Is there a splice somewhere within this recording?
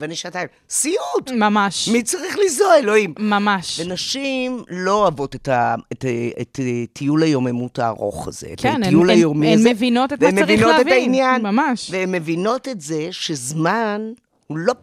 no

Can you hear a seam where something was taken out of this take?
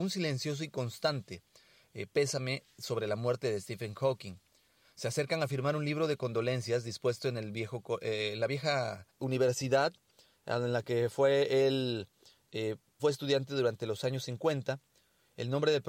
yes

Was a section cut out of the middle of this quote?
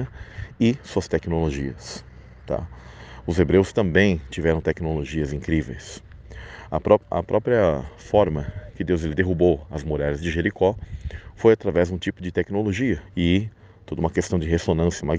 yes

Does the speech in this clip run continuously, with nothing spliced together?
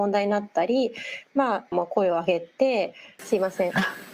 no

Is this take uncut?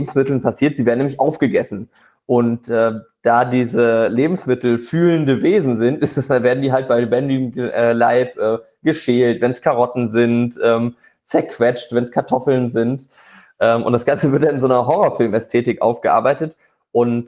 yes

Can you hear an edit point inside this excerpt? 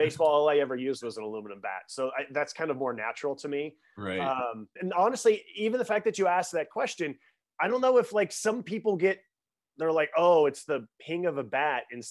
yes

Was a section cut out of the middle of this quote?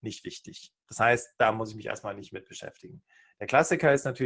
no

